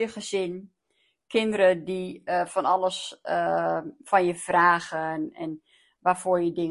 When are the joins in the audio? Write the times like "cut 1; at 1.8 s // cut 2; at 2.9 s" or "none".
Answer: none